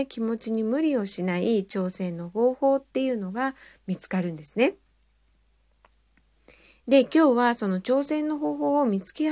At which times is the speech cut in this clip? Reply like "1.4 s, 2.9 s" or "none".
none